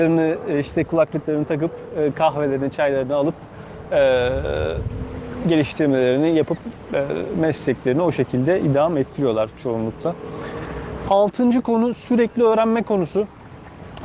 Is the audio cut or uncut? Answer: uncut